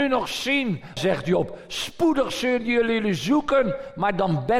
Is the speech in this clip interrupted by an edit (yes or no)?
yes